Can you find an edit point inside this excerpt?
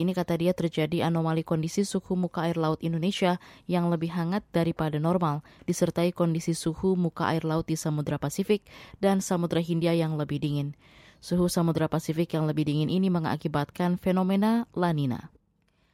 no; 0 cuts

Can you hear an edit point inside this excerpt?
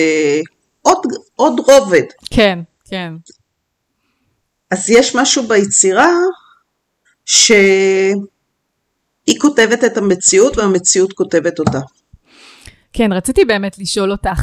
no; 0 cuts

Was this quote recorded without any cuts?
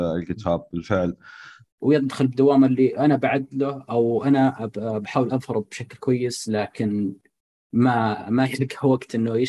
no; 1 cut; at 1.6 s

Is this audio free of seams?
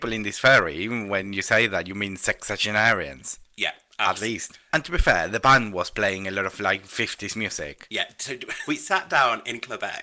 no; 2 cuts; at 4.7 s, 8.7 s

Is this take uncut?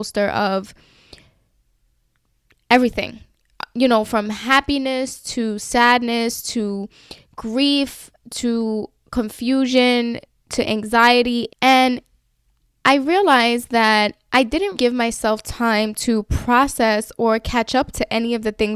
no; 2 cuts; at 11.5 s, 14.7 s

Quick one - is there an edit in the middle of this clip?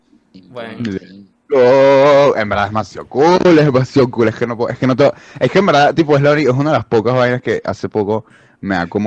no; 0 cuts

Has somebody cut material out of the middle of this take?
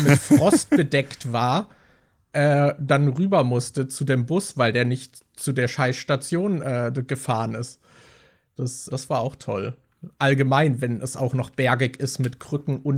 yes; 1 cut; at 8.9 s

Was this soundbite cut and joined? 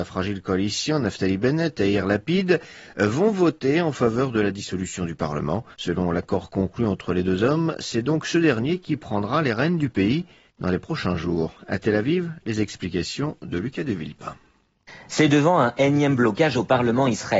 yes; 1 cut; at 5.7 s

